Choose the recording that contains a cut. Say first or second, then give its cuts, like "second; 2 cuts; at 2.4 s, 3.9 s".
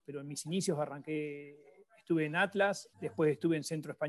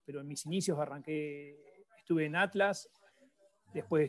first; 1 cut; at 2.9 s